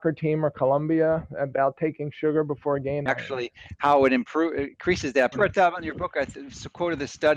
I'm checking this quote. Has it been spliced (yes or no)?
yes